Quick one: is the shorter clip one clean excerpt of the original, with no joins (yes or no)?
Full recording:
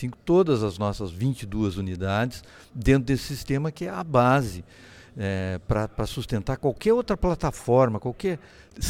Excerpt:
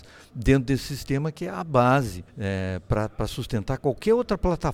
no